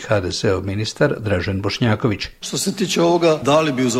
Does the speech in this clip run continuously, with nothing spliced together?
no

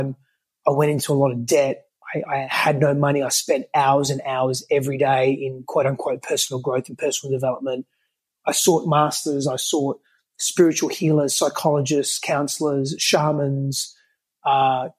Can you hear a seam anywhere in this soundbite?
no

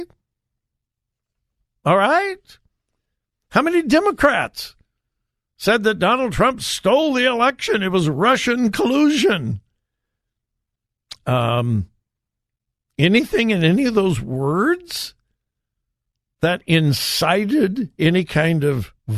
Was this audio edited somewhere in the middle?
no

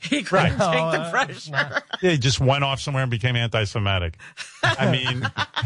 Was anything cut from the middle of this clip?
no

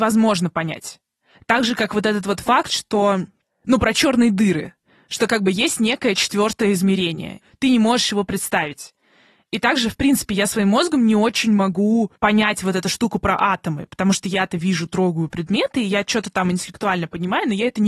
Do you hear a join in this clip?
yes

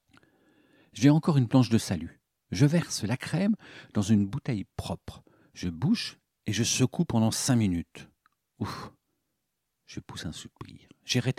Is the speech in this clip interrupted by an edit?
no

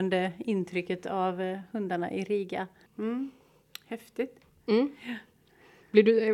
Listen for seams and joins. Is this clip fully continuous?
no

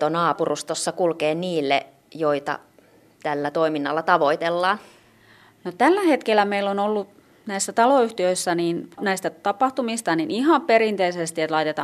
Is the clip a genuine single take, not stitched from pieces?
no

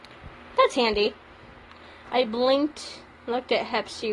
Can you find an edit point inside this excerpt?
yes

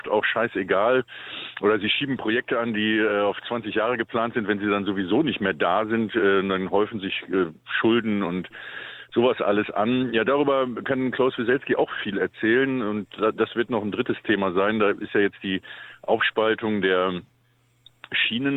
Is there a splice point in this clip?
no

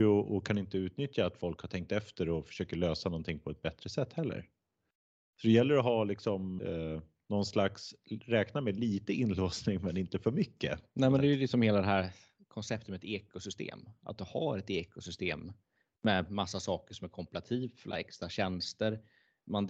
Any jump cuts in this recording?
yes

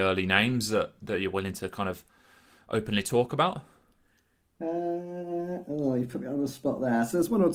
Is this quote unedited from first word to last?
yes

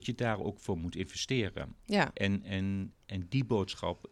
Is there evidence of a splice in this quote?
yes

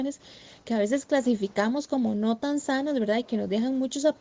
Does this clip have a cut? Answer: no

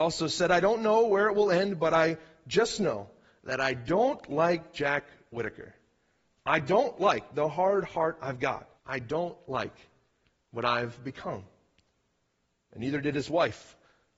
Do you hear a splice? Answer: yes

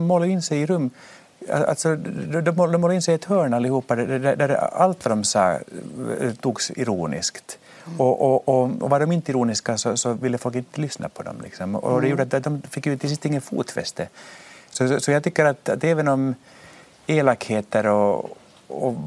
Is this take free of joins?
yes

